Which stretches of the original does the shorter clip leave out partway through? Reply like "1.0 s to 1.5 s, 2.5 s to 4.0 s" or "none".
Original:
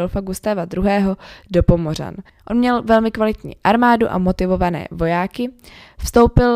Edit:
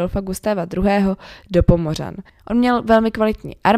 none